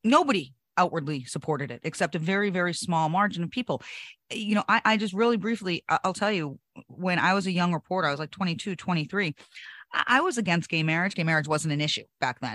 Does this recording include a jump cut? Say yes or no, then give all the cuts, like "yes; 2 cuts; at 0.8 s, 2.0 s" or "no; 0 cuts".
yes; 1 cut; at 11.1 s